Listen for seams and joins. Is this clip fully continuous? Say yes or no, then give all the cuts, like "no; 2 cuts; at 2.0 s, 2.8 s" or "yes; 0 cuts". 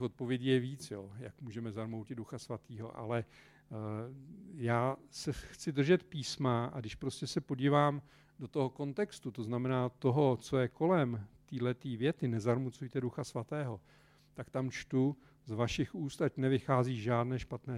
yes; 0 cuts